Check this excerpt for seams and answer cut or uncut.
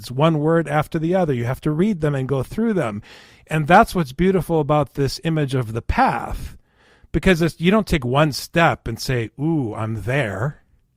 uncut